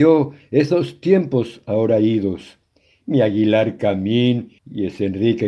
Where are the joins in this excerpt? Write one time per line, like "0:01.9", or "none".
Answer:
0:04.6